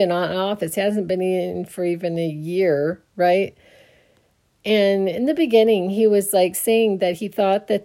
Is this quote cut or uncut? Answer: uncut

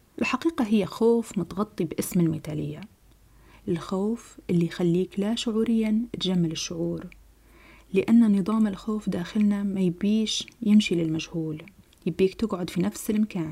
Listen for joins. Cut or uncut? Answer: uncut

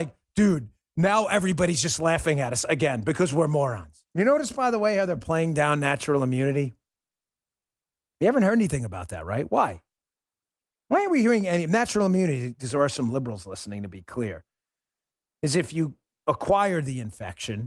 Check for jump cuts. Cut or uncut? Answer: cut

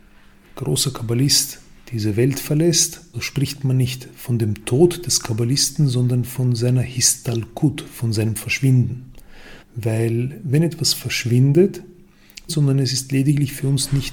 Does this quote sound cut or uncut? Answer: cut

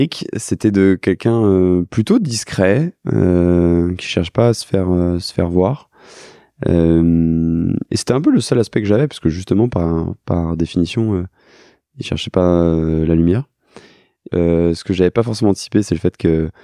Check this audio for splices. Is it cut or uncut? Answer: cut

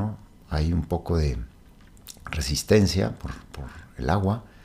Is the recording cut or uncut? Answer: uncut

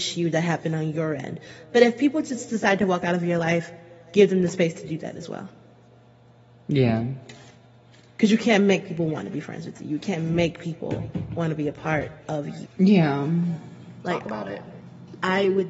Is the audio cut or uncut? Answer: cut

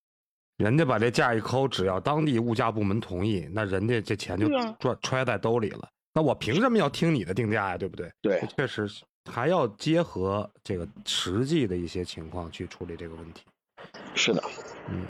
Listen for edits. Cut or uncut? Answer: cut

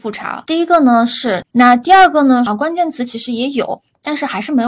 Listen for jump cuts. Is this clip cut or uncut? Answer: cut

